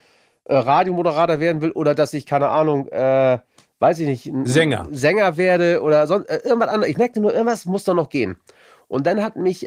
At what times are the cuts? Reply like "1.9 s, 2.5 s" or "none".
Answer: none